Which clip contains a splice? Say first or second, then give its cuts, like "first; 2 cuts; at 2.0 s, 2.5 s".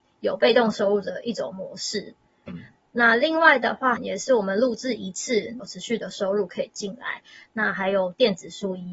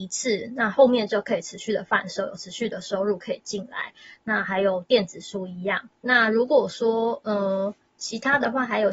first; 3 cuts; at 2.5 s, 4.0 s, 5.6 s